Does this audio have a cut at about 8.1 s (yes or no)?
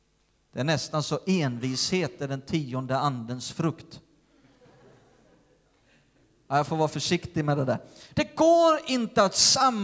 yes